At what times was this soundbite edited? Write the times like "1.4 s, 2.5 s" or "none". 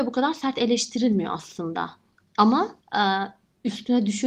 2.8 s